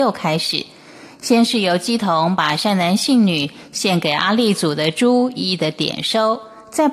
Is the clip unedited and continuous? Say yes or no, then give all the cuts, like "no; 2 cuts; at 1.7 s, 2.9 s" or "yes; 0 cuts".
no; 1 cut; at 5.4 s